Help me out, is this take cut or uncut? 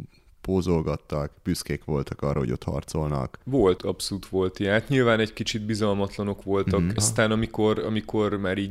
cut